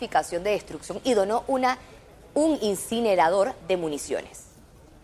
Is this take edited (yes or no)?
no